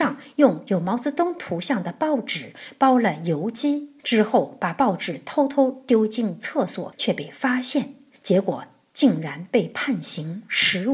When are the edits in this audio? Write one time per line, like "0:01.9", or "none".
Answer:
none